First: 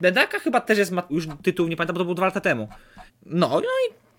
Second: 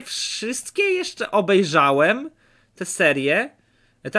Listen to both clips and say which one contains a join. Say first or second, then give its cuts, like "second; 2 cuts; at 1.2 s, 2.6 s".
first; 2 cuts; at 1.1 s, 3.1 s